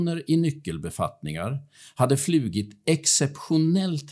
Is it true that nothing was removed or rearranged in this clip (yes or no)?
yes